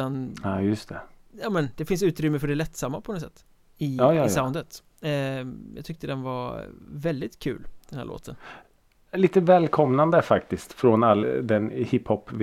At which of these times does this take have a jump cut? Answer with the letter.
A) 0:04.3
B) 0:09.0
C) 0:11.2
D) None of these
C